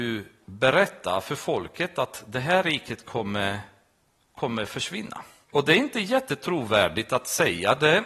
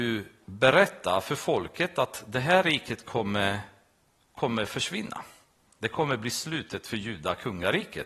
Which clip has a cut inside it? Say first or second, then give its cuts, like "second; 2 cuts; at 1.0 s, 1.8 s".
first; 1 cut; at 5.5 s